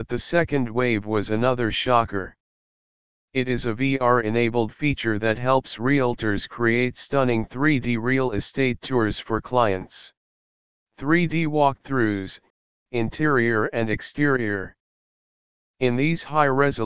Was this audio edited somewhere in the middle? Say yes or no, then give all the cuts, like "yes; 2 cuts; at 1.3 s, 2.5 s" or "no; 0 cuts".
yes; 2 cuts; at 3.2 s, 10.8 s